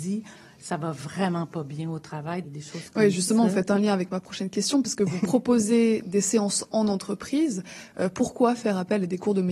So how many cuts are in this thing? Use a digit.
1